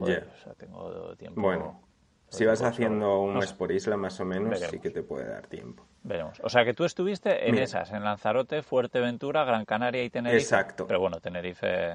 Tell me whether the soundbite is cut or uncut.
uncut